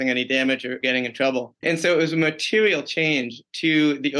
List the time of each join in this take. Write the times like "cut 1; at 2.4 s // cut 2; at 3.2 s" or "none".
cut 1; at 1.6 s